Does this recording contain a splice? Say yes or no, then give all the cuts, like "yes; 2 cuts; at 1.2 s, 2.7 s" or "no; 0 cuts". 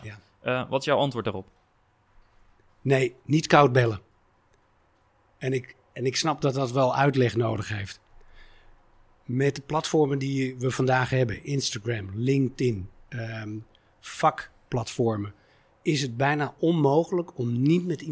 no; 0 cuts